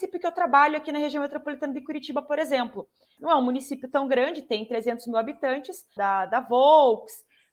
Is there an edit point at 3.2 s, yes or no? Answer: yes